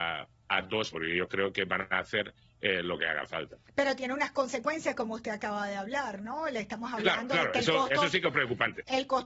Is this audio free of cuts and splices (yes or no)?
no